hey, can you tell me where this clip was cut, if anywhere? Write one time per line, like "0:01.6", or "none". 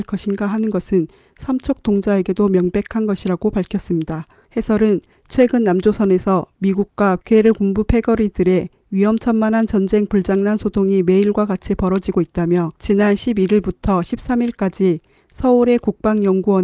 0:04.5
0:12.8